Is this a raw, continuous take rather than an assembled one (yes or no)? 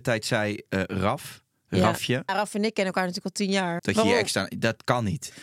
no